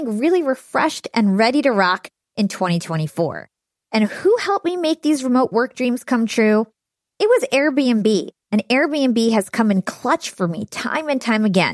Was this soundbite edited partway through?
no; 0 cuts

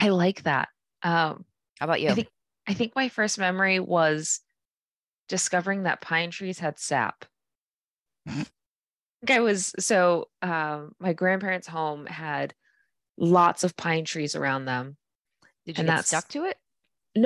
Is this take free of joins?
no; 1 cut; at 15.6 s

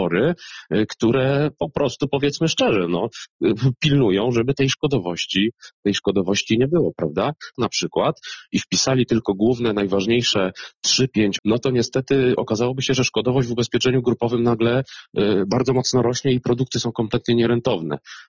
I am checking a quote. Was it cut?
yes; 2 cuts; at 7.5 s, 11.4 s

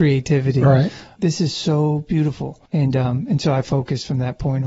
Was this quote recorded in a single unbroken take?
no; 2 cuts; at 1.2 s, 2.7 s

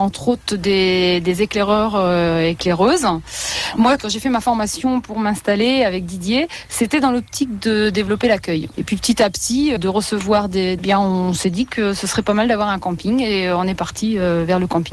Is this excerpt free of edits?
no; 3 cuts; at 8.7 s, 9.8 s, 10.8 s

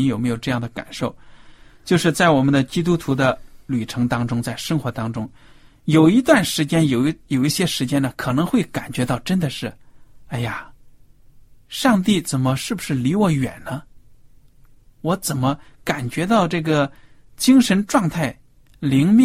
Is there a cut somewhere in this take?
no; 0 cuts

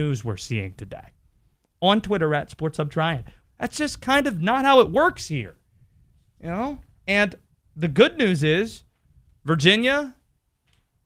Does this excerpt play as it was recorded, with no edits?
no; 1 cut; at 3.4 s

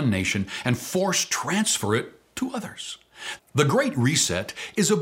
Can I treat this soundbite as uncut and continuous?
no; 1 cut; at 3.4 s

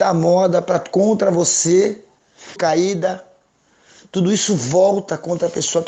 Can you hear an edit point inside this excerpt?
yes; 1 cut; at 2.6 s

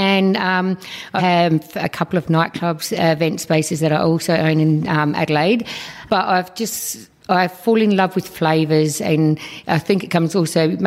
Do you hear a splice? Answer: yes; 1 cut; at 1.2 s

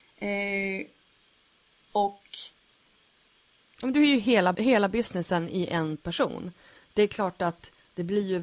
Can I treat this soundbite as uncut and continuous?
no; 1 cut; at 4.5 s

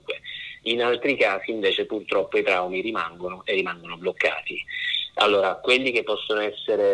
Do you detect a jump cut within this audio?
no; 0 cuts

